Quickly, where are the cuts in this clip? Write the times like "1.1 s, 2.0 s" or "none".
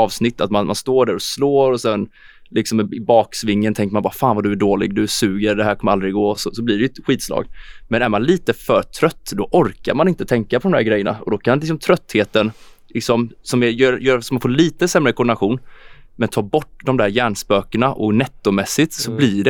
none

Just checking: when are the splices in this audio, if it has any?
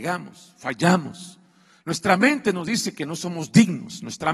none

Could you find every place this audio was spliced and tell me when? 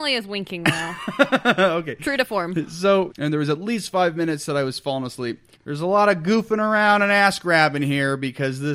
3.1 s, 5.5 s

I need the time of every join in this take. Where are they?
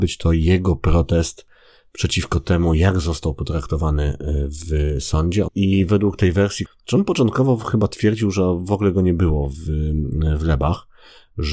5.5 s, 6.7 s

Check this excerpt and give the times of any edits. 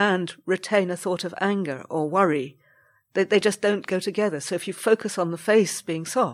none

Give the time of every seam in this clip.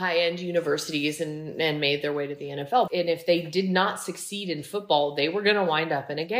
2.9 s

